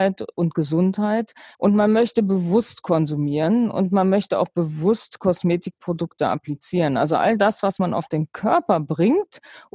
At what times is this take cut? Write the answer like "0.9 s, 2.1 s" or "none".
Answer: 1.5 s